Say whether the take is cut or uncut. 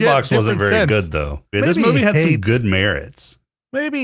cut